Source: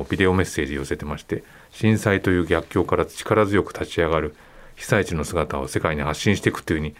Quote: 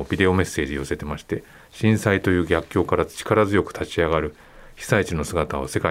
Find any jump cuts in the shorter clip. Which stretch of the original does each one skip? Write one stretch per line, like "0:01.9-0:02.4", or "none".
none